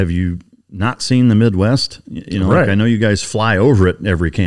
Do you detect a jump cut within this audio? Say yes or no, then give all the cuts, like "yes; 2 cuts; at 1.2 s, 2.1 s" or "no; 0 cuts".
no; 0 cuts